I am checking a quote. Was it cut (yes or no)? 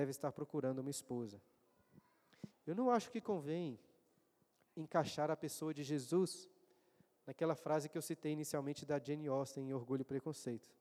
yes